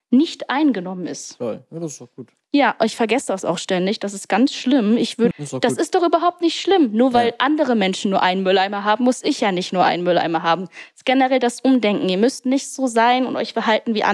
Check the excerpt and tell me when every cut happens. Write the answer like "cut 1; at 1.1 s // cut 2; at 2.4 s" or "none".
cut 1; at 5.3 s

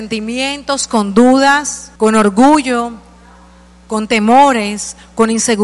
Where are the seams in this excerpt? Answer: cut 1; at 2.0 s

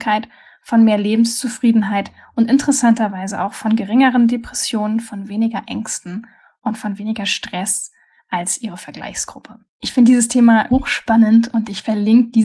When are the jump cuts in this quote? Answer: cut 1; at 10.7 s

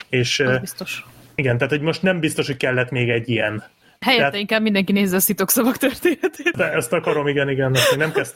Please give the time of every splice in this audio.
cut 1; at 6.5 s

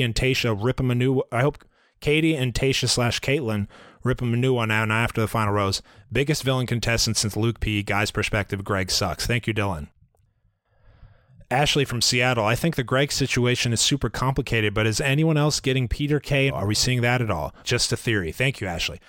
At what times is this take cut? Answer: cut 1; at 16.5 s // cut 2; at 17.6 s

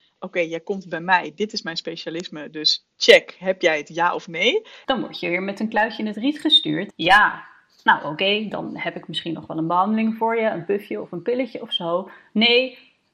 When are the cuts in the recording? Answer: cut 1; at 2.9 s // cut 2; at 4.8 s // cut 3; at 6.9 s

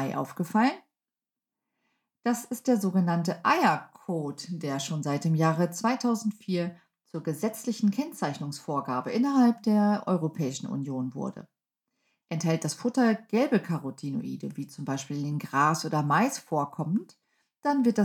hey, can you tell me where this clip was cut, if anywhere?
cut 1; at 12.2 s

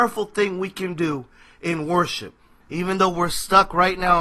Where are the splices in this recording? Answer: cut 1; at 2.6 s

